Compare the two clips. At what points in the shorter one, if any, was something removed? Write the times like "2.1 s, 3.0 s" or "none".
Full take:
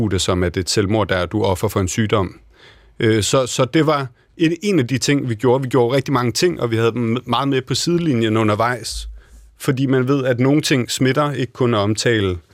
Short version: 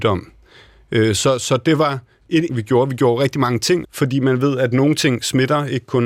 2.5 s, 3.8 s